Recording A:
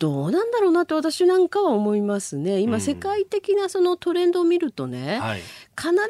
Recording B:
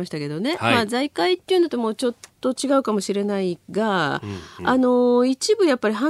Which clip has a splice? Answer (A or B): B